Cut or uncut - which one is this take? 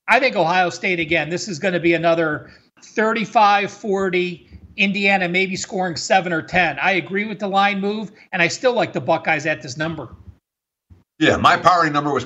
cut